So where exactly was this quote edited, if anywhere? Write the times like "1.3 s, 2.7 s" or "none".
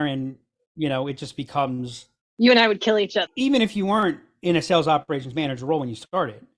3.3 s